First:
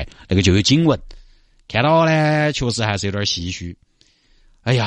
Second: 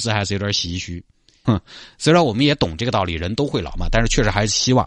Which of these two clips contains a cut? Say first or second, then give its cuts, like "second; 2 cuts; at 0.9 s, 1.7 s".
second; 1 cut; at 1.4 s